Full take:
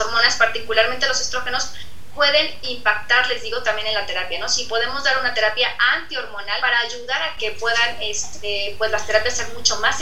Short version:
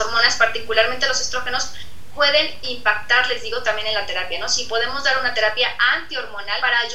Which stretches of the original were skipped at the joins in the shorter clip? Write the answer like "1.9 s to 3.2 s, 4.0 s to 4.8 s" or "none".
none